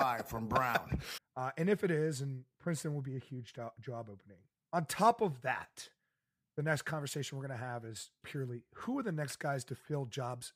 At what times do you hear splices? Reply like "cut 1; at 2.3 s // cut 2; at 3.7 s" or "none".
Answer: cut 1; at 1.2 s // cut 2; at 8.2 s